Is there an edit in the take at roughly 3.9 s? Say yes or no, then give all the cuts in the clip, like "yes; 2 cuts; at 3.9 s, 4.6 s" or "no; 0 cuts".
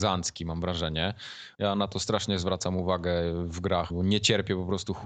yes; 2 cuts; at 1.5 s, 3.9 s